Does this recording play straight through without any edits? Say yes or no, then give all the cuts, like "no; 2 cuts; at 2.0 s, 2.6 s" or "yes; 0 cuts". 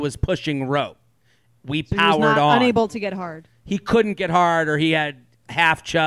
yes; 0 cuts